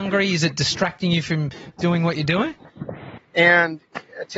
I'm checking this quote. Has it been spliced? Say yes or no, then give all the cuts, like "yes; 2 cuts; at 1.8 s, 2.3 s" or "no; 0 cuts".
yes; 1 cut; at 3.2 s